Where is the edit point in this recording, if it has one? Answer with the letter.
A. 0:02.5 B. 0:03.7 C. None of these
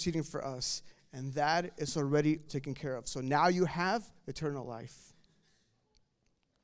A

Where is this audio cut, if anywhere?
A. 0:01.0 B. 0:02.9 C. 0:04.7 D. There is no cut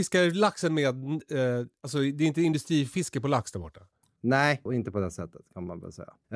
C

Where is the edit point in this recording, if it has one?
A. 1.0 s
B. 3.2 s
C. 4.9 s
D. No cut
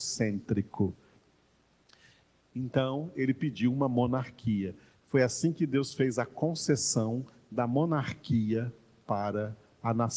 C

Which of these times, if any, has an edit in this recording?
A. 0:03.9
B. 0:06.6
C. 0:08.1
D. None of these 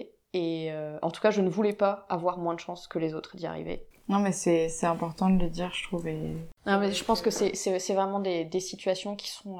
A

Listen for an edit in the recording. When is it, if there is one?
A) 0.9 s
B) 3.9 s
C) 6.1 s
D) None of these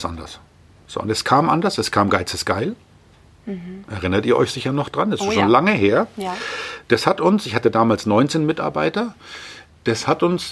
D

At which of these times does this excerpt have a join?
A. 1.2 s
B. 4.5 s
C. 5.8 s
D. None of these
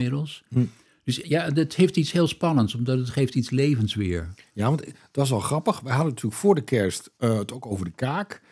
A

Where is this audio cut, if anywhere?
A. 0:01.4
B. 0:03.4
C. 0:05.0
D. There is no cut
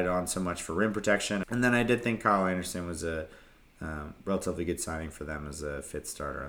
A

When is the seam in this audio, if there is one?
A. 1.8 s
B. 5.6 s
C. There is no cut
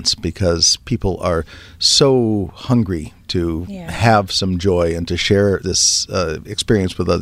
B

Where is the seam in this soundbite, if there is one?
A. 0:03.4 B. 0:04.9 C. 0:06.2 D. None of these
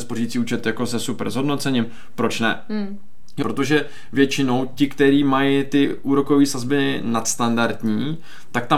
A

